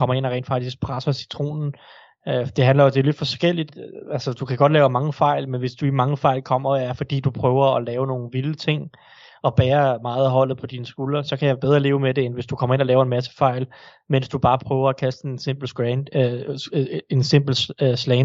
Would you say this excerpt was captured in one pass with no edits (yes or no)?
yes